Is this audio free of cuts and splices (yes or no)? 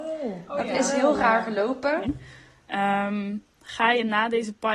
no